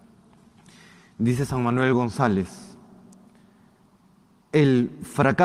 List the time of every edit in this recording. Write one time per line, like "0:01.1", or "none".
none